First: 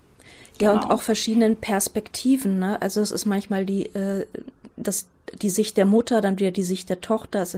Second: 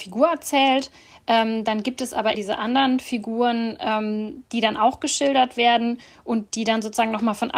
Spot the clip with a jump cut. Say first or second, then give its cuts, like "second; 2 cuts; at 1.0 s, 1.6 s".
second; 1 cut; at 2.3 s